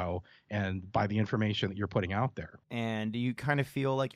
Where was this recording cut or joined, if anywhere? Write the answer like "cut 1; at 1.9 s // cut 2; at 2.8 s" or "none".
cut 1; at 2.6 s